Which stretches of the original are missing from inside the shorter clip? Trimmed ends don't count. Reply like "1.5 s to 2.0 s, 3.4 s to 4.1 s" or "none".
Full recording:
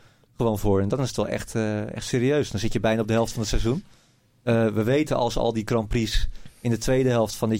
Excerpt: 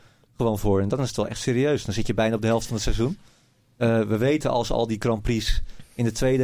1.3 s to 1.9 s